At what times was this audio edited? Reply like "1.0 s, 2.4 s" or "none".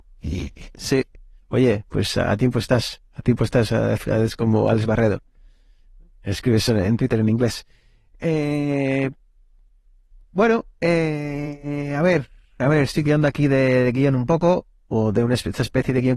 none